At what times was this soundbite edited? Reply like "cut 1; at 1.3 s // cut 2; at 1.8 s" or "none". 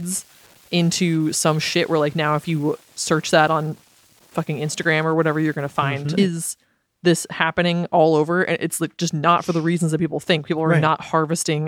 cut 1; at 6.2 s